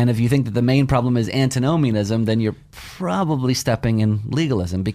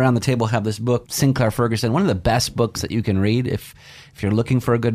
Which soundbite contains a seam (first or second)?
second